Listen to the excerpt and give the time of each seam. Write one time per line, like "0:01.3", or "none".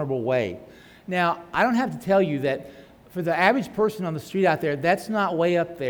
none